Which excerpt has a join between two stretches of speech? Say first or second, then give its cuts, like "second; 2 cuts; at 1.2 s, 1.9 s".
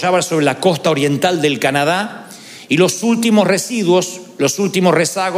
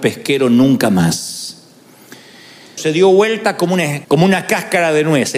second; 2 cuts; at 2.8 s, 4.0 s